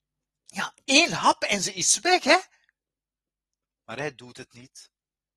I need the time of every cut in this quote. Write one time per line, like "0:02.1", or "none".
none